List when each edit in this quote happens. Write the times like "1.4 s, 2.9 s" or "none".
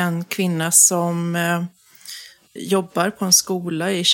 2.6 s